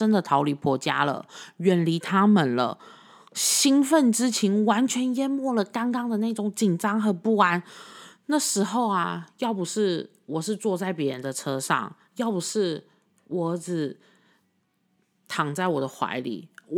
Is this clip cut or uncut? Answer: uncut